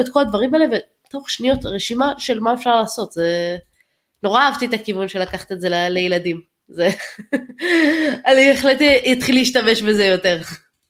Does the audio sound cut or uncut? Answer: uncut